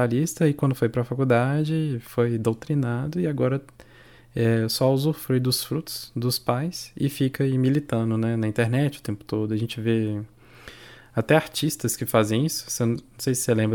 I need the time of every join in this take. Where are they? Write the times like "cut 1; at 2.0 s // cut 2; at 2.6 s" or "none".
none